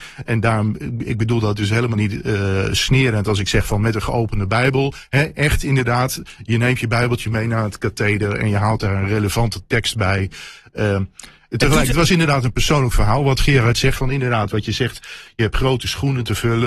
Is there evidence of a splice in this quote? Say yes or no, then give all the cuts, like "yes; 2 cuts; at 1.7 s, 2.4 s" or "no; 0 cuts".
yes; 1 cut; at 14.0 s